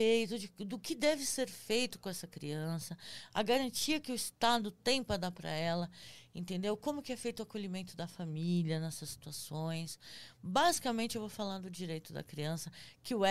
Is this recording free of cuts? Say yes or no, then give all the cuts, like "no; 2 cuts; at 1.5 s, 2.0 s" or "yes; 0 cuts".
yes; 0 cuts